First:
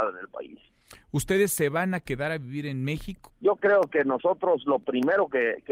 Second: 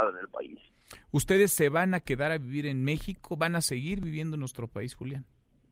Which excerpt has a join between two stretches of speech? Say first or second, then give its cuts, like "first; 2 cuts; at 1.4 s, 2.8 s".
first; 1 cut; at 3.3 s